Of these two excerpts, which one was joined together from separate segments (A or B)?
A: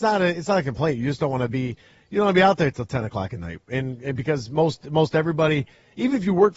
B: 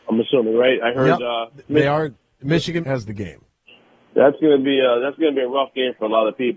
B